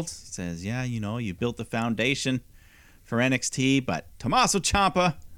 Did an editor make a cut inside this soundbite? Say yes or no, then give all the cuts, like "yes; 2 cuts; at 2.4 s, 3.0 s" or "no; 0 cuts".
no; 0 cuts